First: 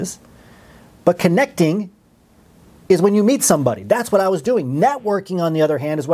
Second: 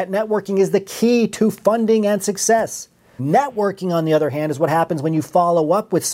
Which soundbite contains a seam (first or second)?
second